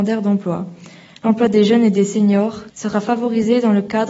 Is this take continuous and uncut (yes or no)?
no